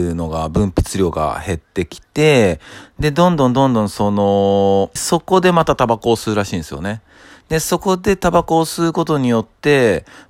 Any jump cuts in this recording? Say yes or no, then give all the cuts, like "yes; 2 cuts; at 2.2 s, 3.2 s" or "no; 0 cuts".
yes; 1 cut; at 5.0 s